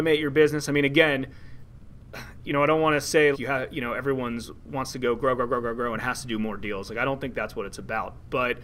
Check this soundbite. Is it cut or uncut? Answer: cut